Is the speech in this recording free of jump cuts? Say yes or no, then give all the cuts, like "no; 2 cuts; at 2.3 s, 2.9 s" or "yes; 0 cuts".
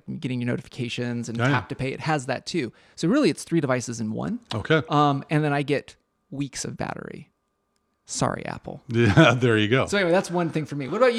yes; 0 cuts